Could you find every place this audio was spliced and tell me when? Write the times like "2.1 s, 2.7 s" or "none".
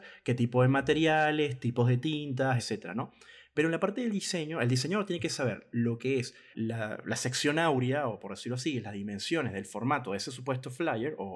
2.6 s, 6.5 s